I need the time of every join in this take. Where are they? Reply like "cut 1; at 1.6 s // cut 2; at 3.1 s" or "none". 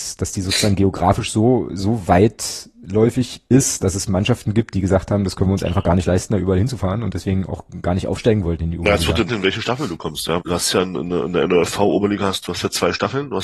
cut 1; at 9.3 s // cut 2; at 10.4 s